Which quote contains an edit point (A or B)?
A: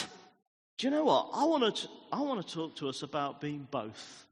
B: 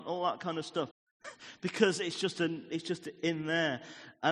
B